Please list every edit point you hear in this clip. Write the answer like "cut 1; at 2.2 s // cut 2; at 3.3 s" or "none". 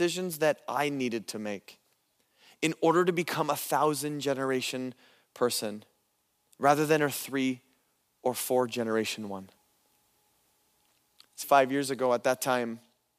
cut 1; at 11.4 s